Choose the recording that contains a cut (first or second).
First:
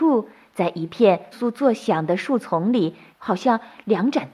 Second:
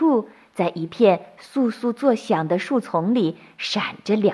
first